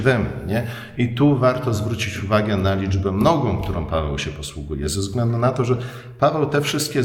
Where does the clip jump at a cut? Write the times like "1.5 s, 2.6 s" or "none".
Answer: none